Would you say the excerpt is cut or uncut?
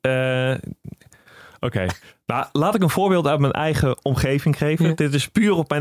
uncut